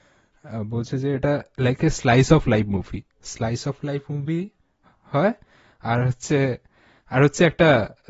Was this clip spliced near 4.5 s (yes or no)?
no